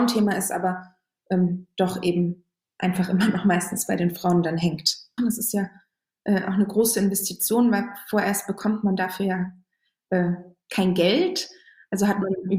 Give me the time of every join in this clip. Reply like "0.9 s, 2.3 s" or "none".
5.2 s